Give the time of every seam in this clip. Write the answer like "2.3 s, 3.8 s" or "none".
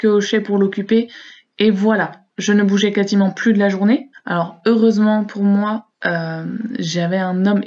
4.1 s